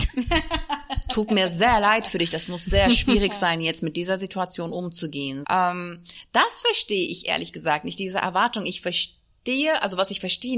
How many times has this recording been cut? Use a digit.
1